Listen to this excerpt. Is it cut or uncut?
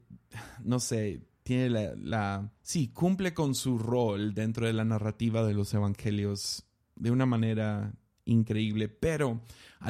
cut